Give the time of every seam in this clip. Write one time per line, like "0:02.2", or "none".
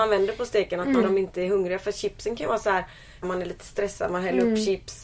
0:01.0
0:03.2